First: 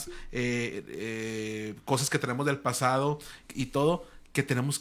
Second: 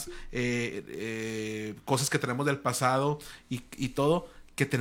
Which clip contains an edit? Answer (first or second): first